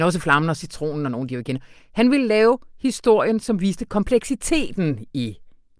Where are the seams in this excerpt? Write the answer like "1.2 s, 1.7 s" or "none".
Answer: none